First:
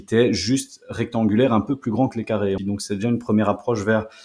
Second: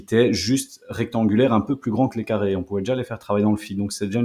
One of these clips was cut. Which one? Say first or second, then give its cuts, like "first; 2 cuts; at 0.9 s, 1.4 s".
first; 1 cut; at 2.6 s